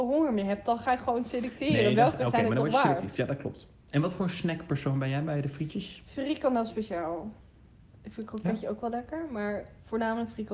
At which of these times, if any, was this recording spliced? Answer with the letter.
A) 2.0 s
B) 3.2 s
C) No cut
C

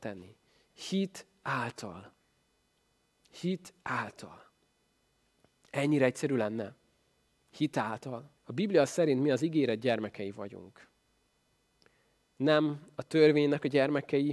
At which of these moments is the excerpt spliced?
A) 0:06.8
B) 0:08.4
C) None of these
B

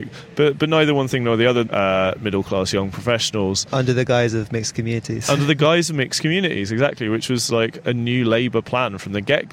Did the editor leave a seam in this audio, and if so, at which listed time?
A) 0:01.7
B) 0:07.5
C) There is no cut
A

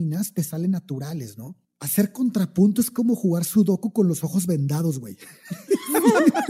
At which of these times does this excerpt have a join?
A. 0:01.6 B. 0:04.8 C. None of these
A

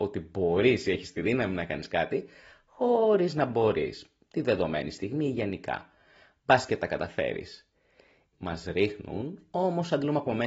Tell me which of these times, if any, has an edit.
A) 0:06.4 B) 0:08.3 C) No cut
B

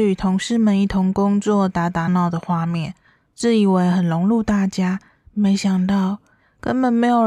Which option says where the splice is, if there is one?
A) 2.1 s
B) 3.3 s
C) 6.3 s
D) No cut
A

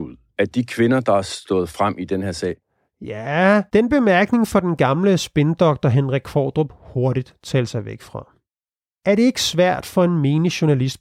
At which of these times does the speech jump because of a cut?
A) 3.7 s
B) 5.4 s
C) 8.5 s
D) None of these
A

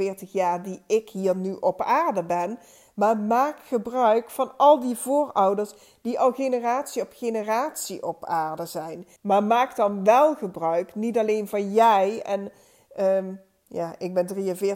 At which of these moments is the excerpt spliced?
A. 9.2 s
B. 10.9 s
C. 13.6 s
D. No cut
A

